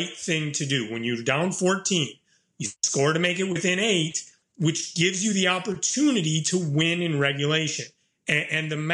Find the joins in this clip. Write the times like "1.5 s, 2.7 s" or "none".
4.4 s